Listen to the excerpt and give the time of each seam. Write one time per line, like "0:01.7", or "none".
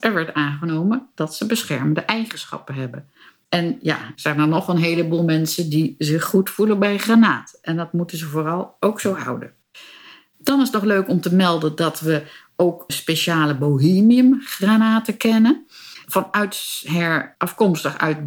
0:04.1
0:12.9